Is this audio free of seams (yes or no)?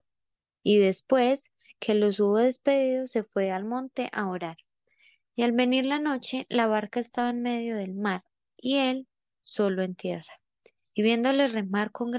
yes